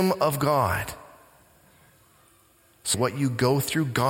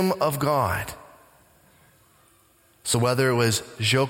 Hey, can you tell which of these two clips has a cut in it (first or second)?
first